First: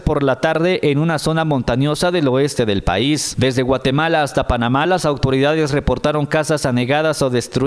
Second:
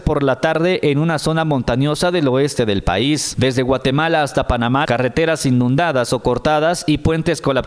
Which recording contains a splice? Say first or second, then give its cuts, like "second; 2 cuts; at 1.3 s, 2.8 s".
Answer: second; 1 cut; at 4.8 s